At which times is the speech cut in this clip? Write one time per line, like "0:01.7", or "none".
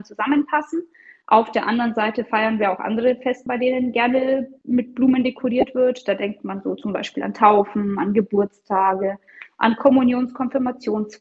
0:03.5

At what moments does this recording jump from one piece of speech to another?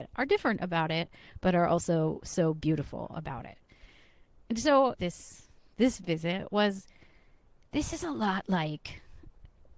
0:04.9

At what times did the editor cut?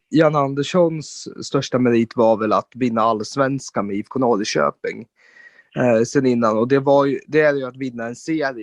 none

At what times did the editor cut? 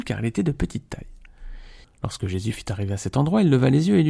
0:01.8

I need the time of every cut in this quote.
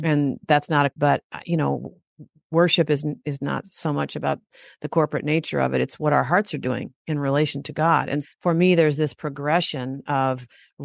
0:01.0
0:08.2

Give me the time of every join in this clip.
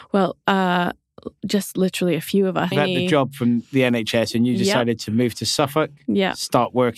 0:02.7

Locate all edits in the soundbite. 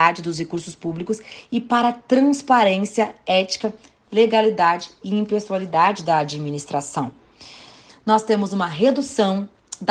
0:07.9

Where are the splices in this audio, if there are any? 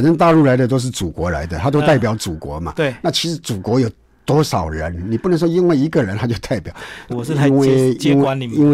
0:07.1

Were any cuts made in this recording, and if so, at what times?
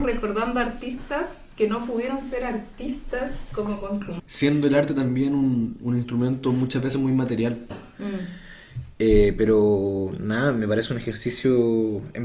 0:04.2
0:07.7

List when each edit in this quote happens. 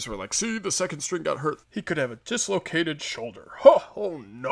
0:01.6

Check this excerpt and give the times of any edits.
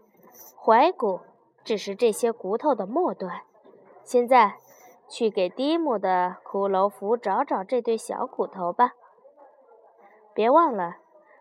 none

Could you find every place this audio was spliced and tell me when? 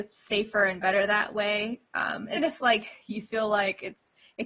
0:02.4

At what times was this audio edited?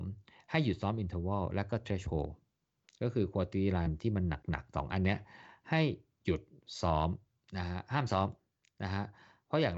none

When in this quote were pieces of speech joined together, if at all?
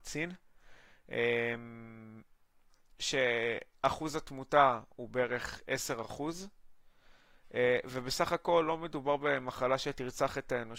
none

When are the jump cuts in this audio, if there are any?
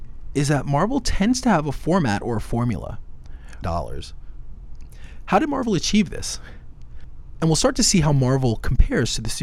0:03.6
0:07.3

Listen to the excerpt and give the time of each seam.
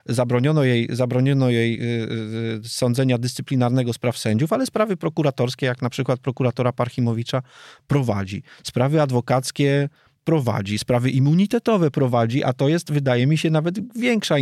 none

